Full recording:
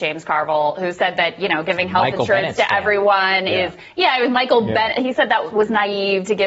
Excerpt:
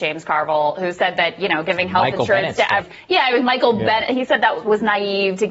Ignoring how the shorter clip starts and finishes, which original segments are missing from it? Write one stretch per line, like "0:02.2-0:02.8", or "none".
0:02.8-0:03.7